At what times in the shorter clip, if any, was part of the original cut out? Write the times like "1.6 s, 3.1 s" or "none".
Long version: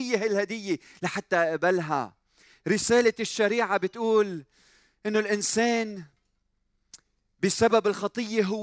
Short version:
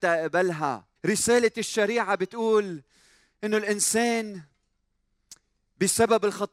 1.0 s